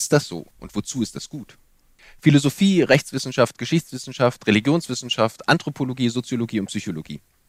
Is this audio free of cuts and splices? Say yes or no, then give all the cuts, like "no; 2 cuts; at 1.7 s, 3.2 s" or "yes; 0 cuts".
yes; 0 cuts